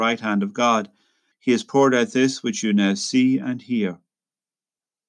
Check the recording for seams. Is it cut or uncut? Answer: cut